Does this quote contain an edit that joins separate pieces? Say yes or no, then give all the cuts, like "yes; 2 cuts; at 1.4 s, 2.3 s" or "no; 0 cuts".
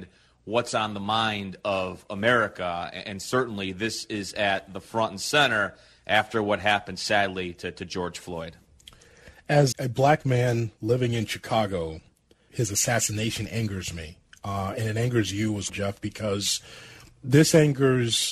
yes; 3 cuts; at 9.7 s, 12.5 s, 15.7 s